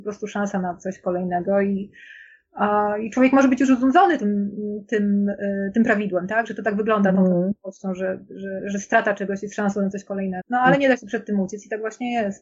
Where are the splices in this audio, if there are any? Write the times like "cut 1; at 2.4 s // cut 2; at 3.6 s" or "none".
cut 1; at 10.4 s

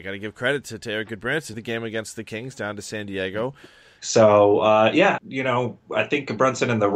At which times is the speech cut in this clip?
cut 1; at 1.5 s // cut 2; at 4.0 s // cut 3; at 5.2 s

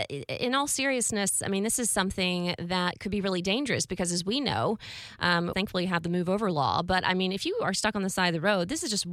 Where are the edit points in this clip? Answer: cut 1; at 5.5 s

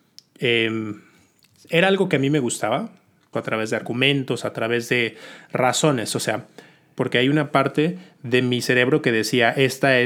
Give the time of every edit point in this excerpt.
cut 1; at 3.3 s // cut 2; at 7.0 s

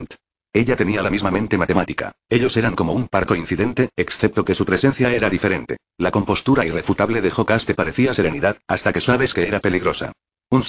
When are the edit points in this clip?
cut 1; at 2.2 s // cut 2; at 5.9 s

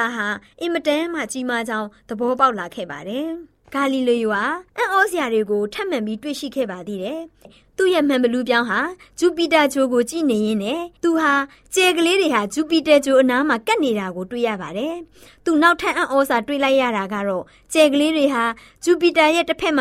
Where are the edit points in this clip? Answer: cut 1; at 11.0 s

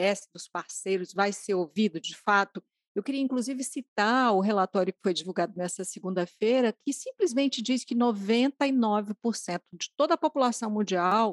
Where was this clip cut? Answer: none

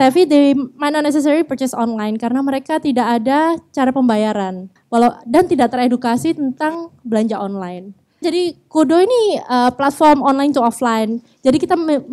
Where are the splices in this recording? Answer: cut 1; at 4.8 s // cut 2; at 8.2 s

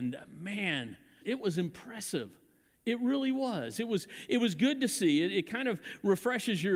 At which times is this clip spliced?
cut 1; at 1.2 s

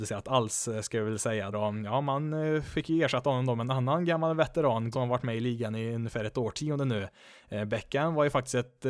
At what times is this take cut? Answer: cut 1; at 1.5 s // cut 2; at 4.9 s

